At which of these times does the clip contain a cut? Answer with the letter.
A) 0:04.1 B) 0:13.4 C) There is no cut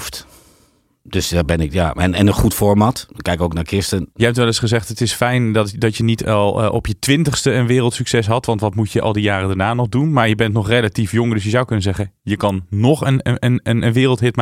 A